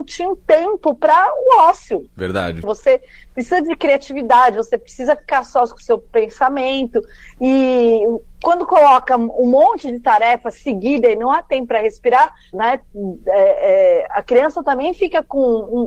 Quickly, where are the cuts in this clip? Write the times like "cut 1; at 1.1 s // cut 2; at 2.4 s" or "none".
cut 1; at 2.6 s // cut 2; at 12.5 s